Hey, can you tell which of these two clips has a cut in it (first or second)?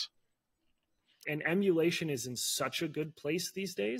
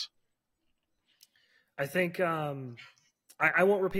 first